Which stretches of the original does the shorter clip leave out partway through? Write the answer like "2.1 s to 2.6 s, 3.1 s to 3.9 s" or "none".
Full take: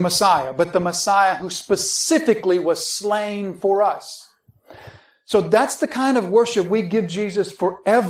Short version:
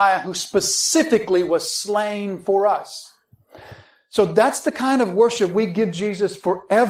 none

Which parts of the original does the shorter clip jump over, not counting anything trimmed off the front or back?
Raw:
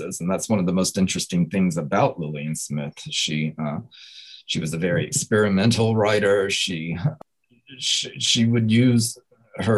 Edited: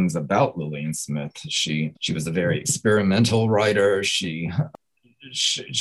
3.6 s to 4.4 s

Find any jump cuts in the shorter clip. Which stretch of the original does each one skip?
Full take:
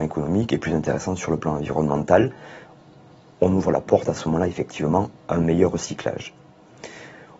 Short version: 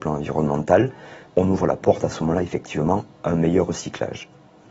2.7 s to 3.3 s

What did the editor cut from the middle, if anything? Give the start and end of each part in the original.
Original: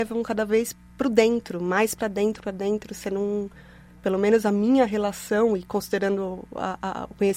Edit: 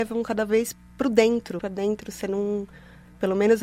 1.6 s to 2.4 s

